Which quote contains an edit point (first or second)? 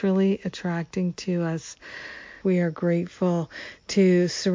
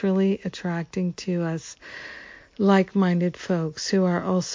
first